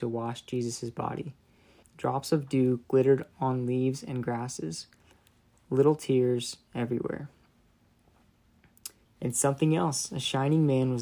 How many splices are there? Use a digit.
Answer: 2